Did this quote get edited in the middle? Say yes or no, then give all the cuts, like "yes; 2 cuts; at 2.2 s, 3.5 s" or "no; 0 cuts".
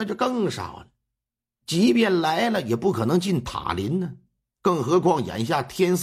no; 0 cuts